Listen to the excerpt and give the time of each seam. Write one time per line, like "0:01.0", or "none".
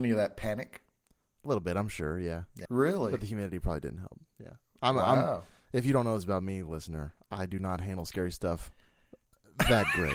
0:02.7